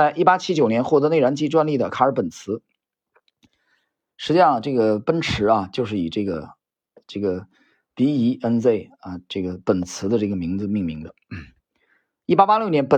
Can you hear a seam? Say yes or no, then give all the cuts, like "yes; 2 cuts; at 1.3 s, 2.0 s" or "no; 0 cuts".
no; 0 cuts